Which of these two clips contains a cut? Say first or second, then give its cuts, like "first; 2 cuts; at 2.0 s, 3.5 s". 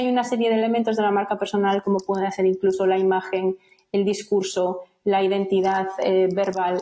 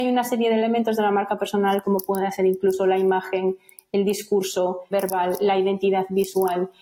second; 1 cut; at 4.9 s